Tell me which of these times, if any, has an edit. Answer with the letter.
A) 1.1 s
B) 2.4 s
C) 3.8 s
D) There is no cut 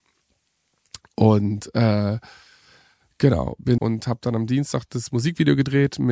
C